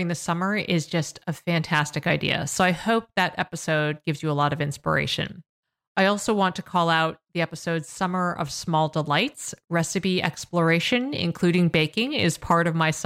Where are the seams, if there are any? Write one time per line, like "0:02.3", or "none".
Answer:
none